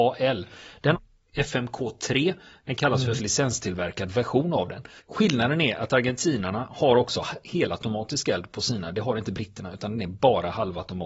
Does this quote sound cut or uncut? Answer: cut